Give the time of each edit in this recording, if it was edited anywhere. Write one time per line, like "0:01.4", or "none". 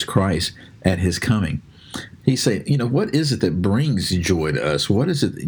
0:02.2